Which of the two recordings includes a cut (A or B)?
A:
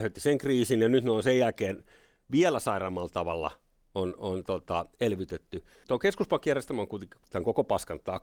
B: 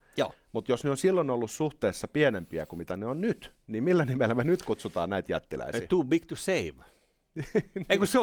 A